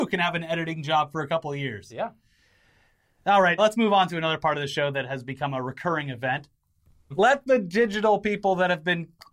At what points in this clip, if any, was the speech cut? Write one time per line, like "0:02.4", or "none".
0:03.6
0:07.1